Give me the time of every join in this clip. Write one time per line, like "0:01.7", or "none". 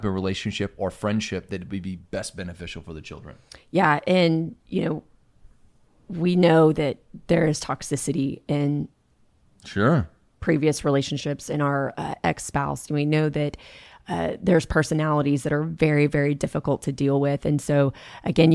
none

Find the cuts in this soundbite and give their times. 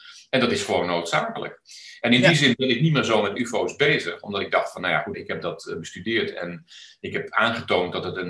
0:05.1

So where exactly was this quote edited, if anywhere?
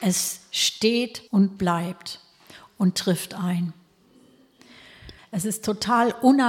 0:01.3
0:05.2

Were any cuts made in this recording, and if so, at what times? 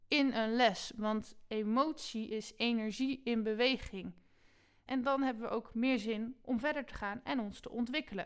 0:04.9

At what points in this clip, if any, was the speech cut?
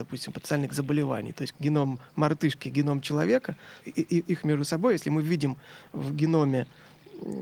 0:01.5
0:03.8

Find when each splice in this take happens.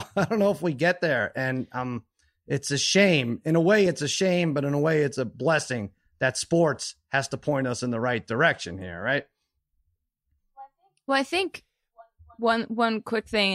none

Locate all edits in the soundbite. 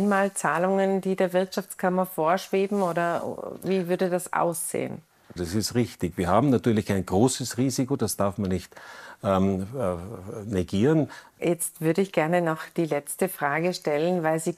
0:05.4
0:11.4

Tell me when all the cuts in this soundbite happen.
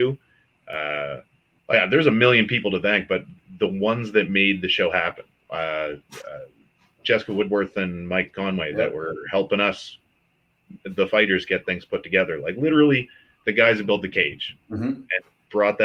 0:01.6

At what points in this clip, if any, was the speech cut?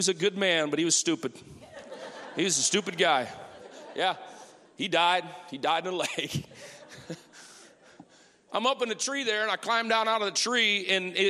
0:03.6
0:08.5

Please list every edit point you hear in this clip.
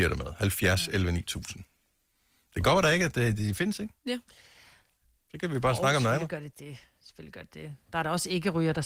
0:04.0

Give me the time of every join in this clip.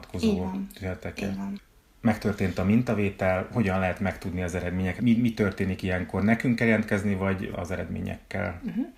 0:05.0
0:07.5

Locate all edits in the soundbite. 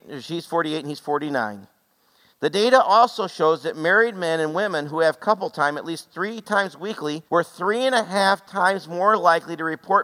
0:02.3
0:07.3

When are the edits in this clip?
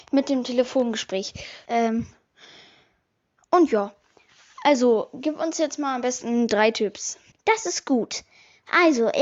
0:01.6
0:07.3

